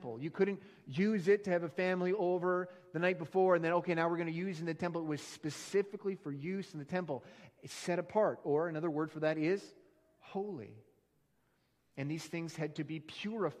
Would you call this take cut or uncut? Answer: uncut